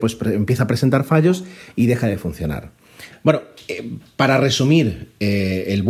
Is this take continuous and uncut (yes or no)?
no